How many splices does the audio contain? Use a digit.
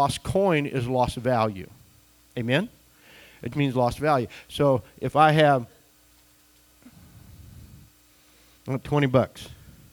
1